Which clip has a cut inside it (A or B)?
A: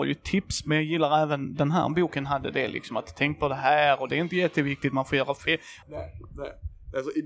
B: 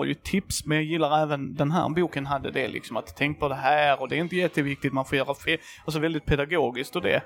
A